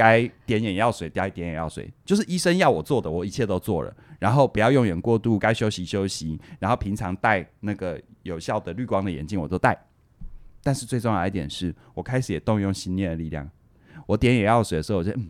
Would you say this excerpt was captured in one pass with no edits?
yes; 0 cuts

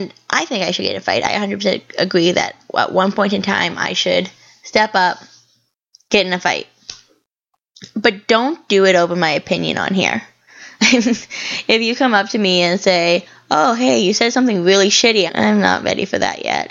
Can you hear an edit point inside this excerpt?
yes; 2 cuts; at 10.5 s, 15.3 s

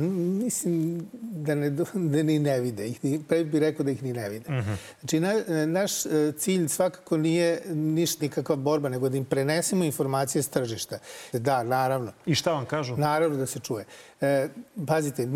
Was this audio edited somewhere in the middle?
yes; 2 cuts; at 8.2 s, 11.3 s

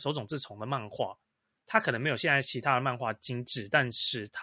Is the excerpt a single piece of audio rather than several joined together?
yes; 0 cuts

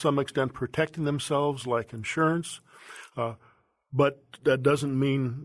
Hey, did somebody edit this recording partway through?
no; 0 cuts

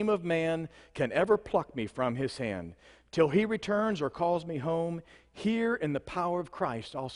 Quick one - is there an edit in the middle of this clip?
no; 0 cuts

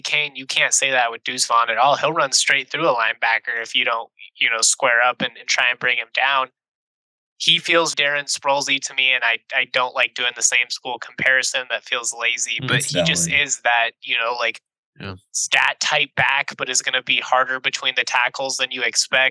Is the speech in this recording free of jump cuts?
no; 1 cut; at 7.9 s

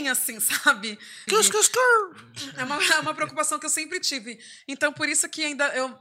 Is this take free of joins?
no; 2 cuts; at 1.3 s, 4.6 s

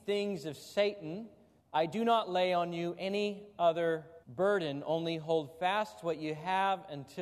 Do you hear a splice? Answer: yes; 2 cuts; at 1.6 s, 4.2 s

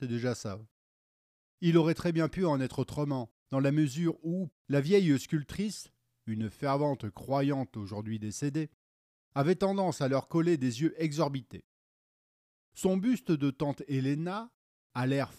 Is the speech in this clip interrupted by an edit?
yes; 1 cut; at 4.5 s

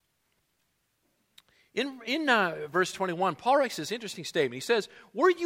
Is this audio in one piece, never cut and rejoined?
no; 1 cut; at 2.7 s

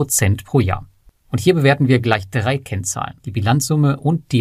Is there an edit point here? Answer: yes; 1 cut; at 3.2 s

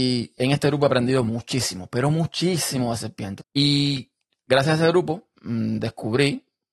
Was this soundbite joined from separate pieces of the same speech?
yes; 2 cuts; at 3.4 s, 5.4 s

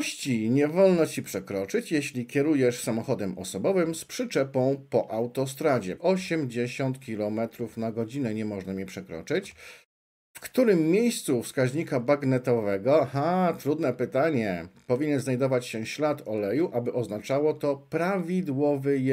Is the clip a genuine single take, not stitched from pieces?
no; 1 cut; at 6.0 s

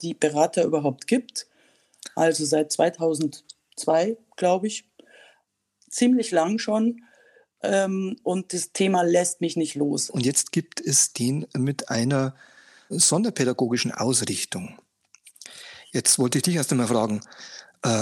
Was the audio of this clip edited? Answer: yes; 2 cuts; at 10.1 s, 12.9 s

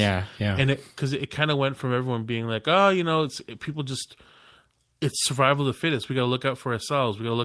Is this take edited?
no; 0 cuts

